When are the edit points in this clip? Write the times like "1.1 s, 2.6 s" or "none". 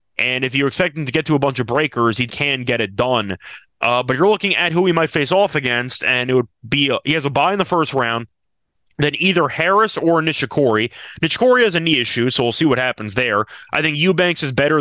2.3 s